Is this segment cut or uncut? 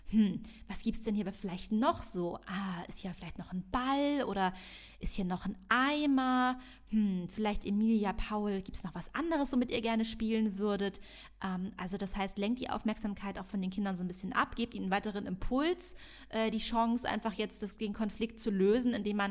uncut